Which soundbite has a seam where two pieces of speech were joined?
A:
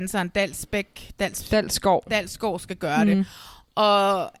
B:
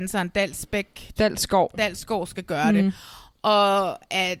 B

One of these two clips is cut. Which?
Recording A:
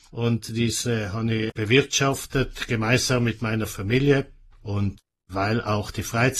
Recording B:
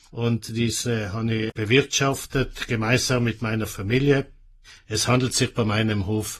A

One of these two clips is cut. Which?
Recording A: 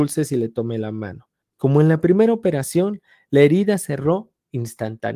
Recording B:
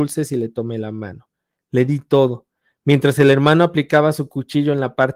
A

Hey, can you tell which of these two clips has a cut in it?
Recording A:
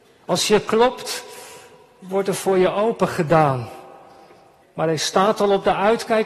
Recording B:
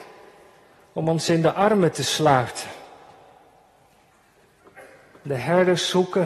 A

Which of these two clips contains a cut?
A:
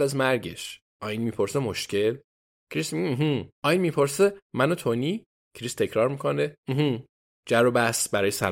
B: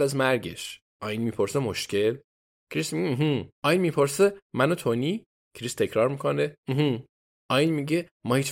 A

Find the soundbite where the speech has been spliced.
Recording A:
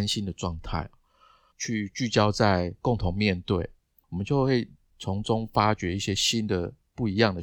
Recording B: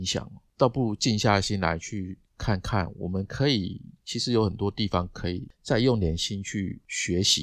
A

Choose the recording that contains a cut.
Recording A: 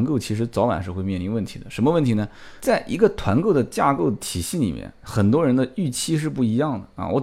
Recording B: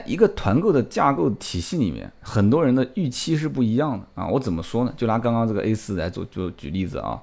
A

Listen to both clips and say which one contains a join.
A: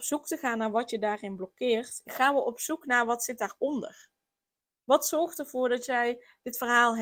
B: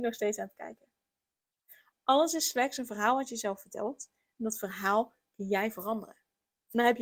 A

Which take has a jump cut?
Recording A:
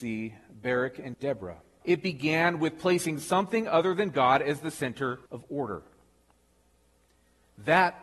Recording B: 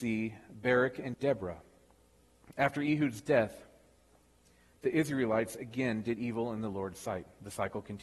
A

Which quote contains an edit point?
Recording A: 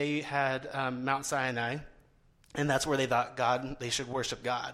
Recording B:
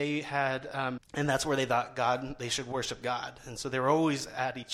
B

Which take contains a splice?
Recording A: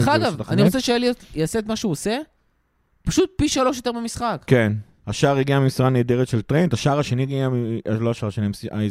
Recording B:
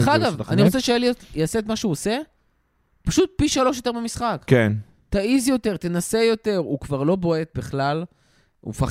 A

